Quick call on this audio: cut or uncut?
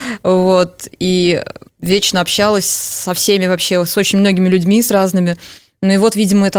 uncut